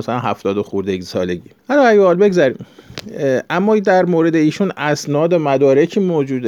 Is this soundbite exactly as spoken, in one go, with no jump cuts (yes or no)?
no